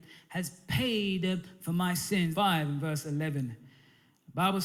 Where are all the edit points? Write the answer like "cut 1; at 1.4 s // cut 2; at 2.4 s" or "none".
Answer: cut 1; at 2.3 s